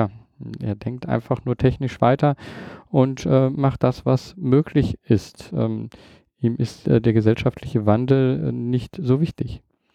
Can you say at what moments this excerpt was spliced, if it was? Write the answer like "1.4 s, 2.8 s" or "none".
none